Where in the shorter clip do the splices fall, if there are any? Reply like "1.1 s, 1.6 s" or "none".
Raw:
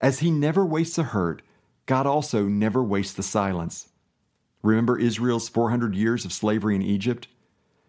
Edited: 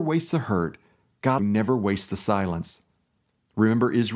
1.4 s